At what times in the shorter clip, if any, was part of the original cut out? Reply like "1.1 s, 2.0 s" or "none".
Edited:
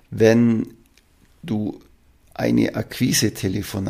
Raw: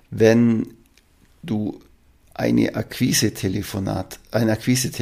none